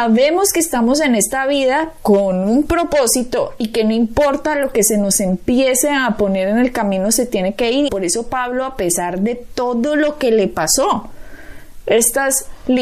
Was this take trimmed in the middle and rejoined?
yes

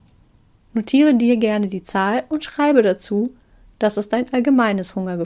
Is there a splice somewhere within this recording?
no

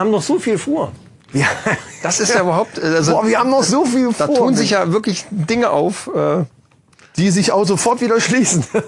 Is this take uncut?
yes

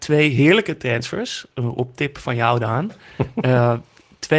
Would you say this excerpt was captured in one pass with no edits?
yes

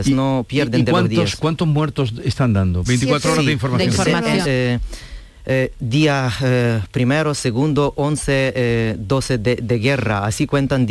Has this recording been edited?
yes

